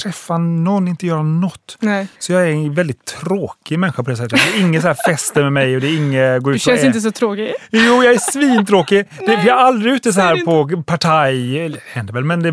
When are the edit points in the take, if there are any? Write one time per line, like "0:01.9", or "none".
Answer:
none